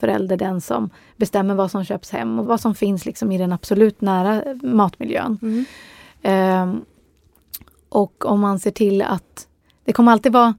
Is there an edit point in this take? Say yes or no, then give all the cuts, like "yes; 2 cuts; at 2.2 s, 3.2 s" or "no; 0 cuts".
yes; 1 cut; at 2.5 s